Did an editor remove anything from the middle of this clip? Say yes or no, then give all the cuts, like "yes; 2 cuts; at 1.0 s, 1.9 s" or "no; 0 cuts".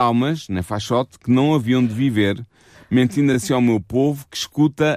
no; 0 cuts